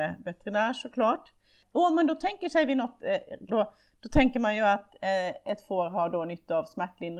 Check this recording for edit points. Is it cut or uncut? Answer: cut